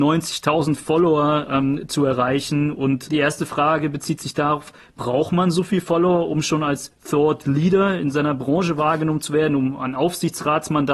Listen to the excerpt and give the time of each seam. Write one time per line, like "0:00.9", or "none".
0:03.1